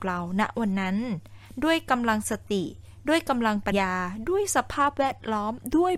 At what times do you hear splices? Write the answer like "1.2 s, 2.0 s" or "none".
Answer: 3.7 s